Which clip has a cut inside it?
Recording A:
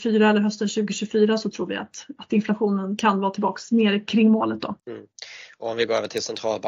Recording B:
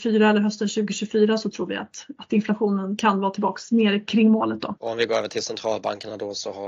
B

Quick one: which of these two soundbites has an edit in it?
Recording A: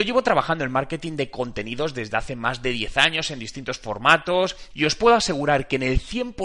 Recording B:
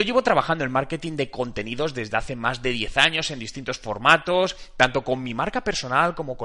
A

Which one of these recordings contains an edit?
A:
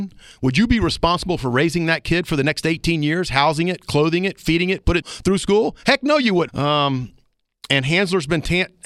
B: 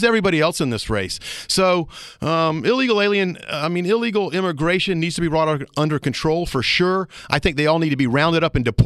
A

